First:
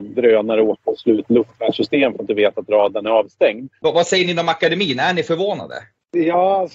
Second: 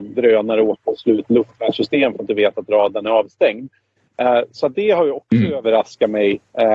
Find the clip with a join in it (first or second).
first